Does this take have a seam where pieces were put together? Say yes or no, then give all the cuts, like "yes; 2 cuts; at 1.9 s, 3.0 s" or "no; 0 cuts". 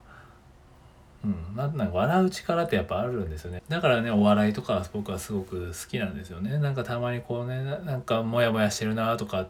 yes; 1 cut; at 3.6 s